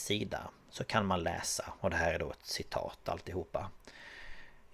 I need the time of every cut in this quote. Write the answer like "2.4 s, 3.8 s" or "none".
none